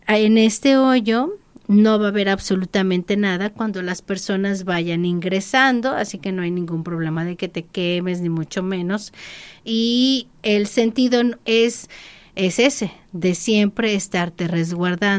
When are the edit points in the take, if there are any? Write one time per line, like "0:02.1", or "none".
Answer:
none